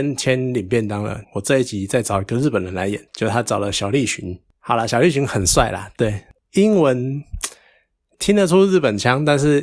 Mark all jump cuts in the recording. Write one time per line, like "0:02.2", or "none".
0:01.2
0:03.1